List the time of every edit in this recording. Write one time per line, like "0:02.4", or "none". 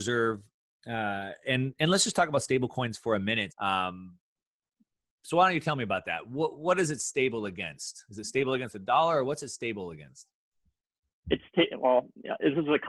0:03.5